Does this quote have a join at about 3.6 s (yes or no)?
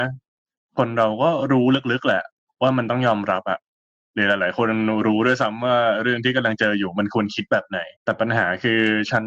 no